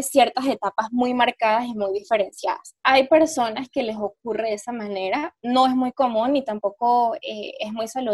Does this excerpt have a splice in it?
no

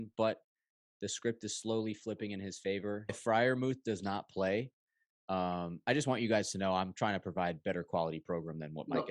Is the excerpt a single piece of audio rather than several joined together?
no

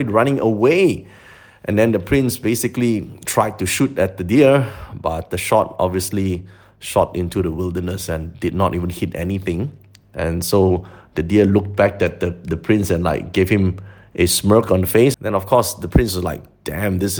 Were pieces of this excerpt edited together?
yes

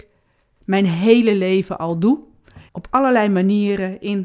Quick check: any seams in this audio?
yes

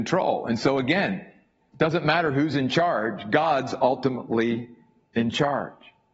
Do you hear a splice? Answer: no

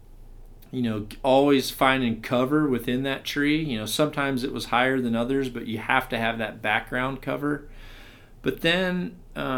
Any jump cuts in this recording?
no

